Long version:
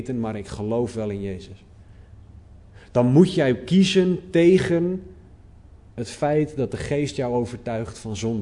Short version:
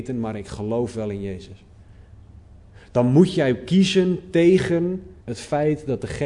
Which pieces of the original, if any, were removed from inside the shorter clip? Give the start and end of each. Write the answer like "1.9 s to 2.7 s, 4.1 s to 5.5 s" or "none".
5.2 s to 5.9 s